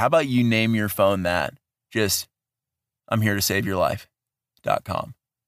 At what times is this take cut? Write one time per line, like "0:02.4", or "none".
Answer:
none